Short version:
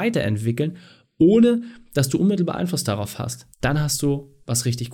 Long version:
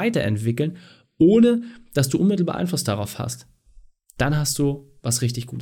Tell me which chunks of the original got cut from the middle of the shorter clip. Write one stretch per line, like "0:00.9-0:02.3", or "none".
0:03.5-0:04.1